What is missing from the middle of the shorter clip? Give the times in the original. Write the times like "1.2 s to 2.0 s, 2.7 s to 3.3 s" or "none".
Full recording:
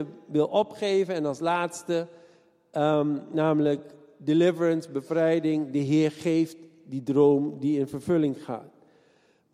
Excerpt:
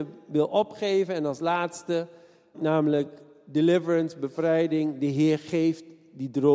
2.5 s to 3.3 s